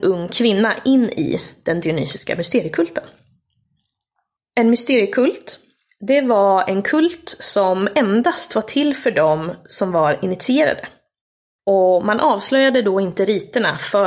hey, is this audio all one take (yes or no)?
yes